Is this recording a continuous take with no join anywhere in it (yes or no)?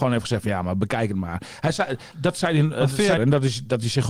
no